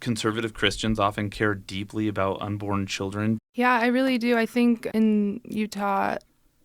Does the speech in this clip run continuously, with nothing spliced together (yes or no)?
no